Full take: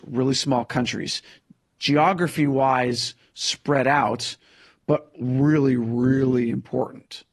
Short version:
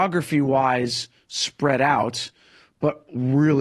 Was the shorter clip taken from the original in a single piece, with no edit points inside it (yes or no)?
yes